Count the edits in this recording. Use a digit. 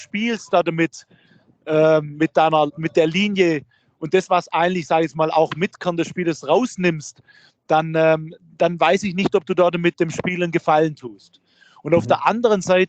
1